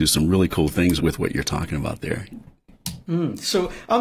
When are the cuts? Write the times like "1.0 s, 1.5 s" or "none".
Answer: 1.0 s